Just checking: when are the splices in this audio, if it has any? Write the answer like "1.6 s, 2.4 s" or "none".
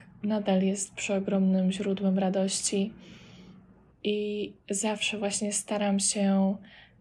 3.9 s